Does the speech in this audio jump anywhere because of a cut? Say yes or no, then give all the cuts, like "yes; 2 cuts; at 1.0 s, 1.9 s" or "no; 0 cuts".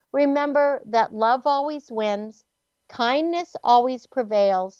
no; 0 cuts